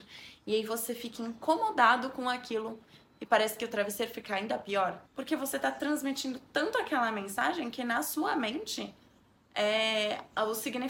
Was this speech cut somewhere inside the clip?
yes; 1 cut; at 5.1 s

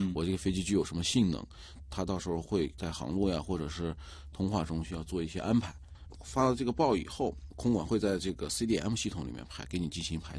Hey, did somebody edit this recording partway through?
no; 0 cuts

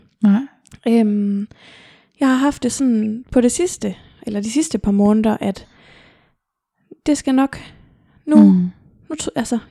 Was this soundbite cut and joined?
no; 0 cuts

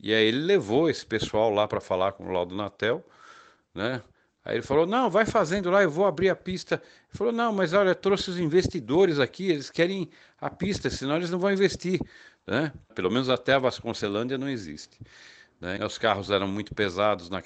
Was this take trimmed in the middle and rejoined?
yes; 2 cuts; at 12.9 s, 15.8 s

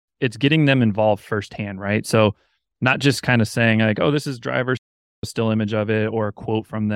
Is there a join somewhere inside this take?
no; 0 cuts

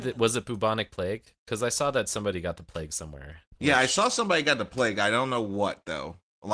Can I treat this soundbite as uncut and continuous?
yes; 0 cuts

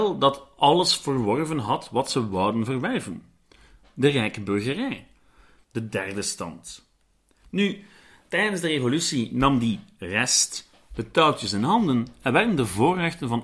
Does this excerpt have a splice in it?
yes; 1 cut; at 5.6 s

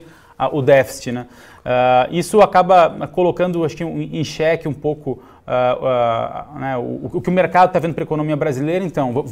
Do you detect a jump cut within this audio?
no; 0 cuts

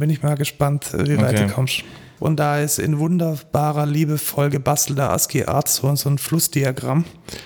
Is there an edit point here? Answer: yes; 1 cut; at 2.2 s

